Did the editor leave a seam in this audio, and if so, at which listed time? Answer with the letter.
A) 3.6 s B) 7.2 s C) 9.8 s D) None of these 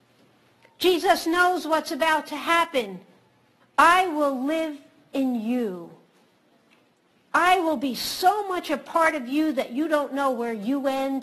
A